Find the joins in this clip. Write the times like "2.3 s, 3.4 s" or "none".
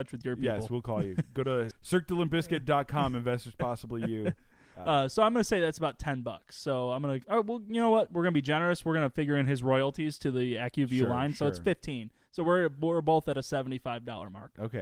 1.7 s, 7.2 s